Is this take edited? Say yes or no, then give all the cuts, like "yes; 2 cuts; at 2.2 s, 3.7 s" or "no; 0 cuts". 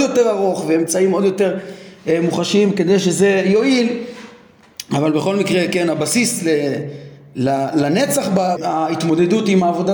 yes; 1 cut; at 8.6 s